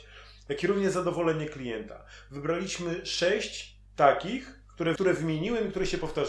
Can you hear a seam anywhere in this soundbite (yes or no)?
yes